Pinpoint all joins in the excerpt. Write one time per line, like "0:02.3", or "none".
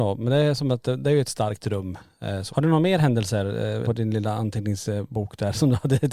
0:02.5
0:03.8